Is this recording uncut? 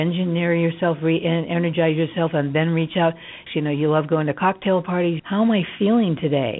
no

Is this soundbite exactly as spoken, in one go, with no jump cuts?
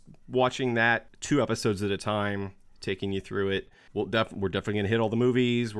yes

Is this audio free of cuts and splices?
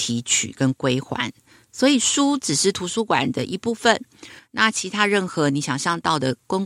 yes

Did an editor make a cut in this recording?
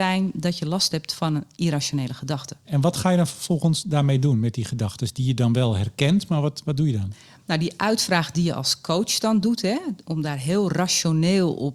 yes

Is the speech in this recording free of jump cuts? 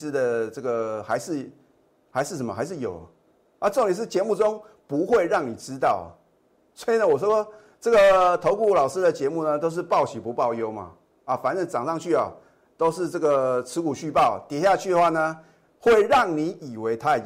yes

